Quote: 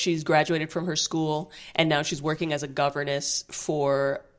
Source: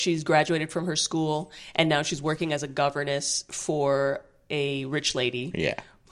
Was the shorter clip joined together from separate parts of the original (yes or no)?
no